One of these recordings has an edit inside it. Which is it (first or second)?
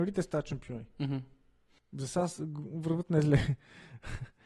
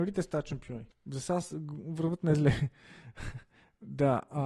second